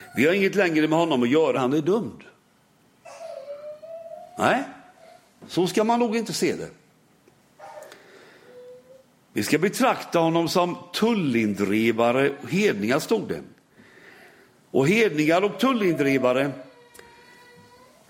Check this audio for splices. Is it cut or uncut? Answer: cut